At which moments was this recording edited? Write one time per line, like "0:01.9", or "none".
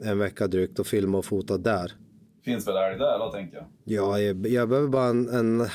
none